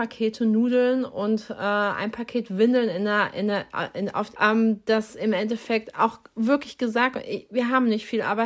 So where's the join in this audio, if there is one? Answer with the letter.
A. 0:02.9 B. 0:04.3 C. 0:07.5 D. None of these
B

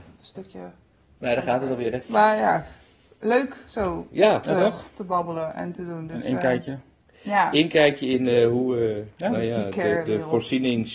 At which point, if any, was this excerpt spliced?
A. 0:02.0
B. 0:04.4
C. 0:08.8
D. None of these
A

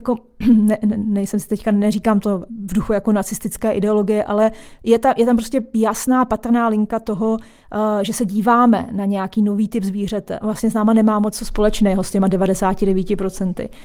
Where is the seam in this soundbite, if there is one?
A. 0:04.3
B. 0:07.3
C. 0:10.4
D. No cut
C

